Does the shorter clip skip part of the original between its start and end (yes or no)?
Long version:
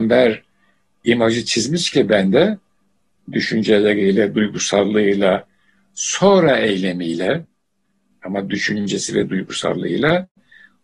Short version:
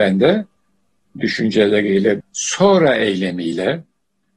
yes